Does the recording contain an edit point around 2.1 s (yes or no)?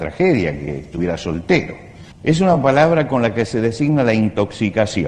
yes